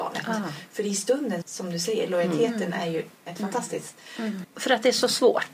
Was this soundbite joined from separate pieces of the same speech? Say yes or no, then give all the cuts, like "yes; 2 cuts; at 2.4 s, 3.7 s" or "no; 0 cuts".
yes; 2 cuts; at 1.4 s, 4.4 s